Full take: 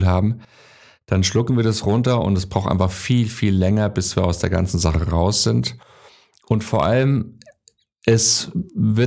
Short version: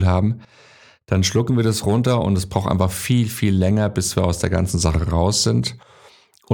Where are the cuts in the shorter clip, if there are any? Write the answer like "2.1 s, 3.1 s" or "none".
none